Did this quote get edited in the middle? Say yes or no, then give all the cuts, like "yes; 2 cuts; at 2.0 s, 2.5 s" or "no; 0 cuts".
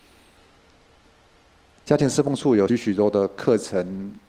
yes; 1 cut; at 2.7 s